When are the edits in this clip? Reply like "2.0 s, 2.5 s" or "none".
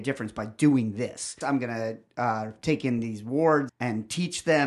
1.4 s, 3.7 s